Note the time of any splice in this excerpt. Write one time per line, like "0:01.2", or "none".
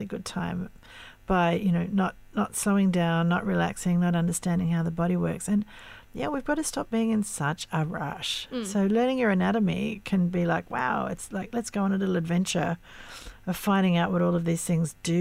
none